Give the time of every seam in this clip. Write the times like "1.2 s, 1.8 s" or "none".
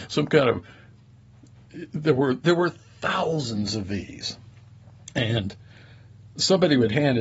none